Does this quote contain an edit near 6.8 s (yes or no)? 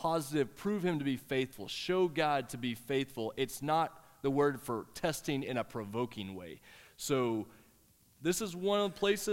no